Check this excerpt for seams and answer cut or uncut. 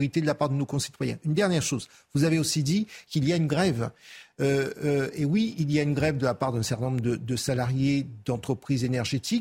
uncut